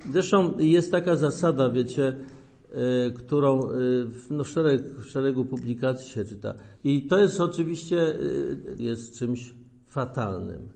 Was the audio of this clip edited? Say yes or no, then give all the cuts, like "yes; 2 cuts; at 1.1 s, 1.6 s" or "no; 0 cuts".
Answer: yes; 2 cuts; at 6.8 s, 8.8 s